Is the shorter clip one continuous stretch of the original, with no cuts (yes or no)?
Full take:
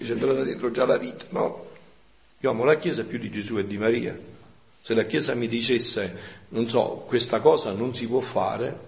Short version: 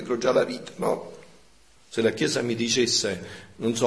no